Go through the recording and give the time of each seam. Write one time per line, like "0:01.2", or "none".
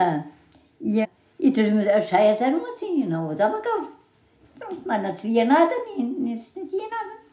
0:01.0